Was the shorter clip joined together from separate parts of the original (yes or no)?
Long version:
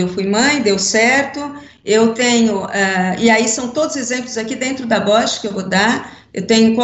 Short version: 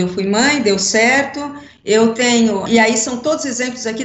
yes